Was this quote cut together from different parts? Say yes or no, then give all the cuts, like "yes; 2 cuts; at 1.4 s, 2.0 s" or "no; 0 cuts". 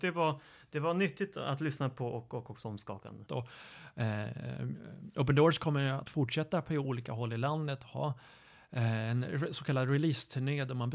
yes; 1 cut; at 3.3 s